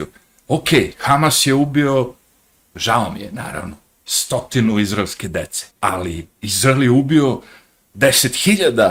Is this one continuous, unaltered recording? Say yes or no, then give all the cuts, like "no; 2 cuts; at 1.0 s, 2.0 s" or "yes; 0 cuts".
no; 1 cut; at 5.7 s